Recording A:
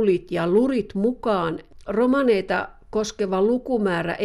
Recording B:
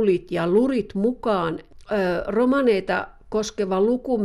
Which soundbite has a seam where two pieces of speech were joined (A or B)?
A